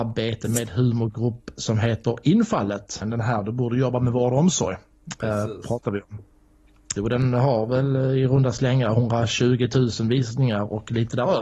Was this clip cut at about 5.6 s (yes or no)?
no